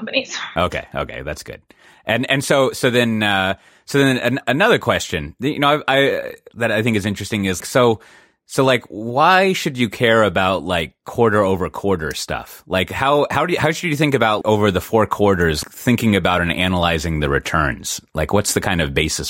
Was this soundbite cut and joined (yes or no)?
yes